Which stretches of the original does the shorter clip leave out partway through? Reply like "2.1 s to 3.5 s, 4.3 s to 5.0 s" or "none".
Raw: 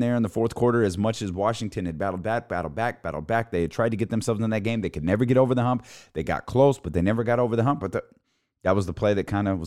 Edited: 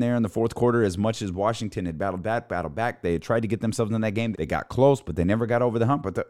3.0 s to 3.5 s, 4.8 s to 6.1 s